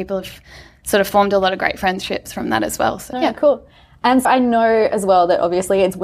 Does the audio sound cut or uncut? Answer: cut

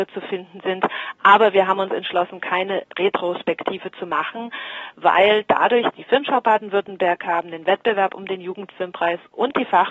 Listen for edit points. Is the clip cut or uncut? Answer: cut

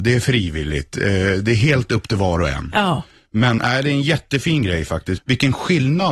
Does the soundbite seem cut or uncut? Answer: cut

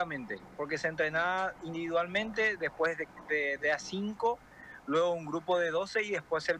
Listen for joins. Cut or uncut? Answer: uncut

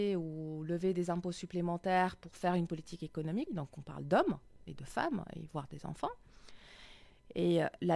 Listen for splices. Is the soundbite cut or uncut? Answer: cut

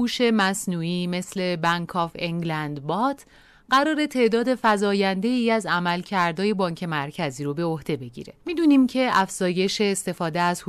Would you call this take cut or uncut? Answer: cut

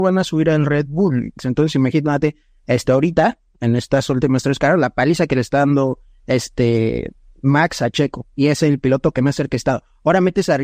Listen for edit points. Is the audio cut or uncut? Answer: cut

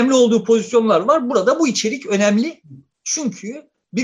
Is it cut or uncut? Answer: uncut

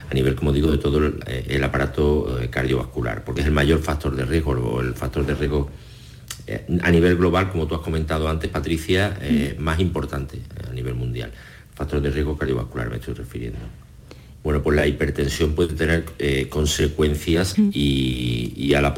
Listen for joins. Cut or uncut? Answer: cut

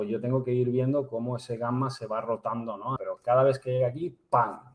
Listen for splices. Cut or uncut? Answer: cut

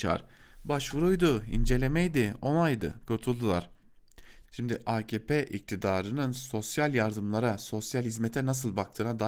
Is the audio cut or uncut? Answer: cut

